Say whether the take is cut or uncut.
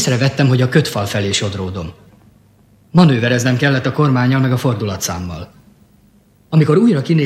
uncut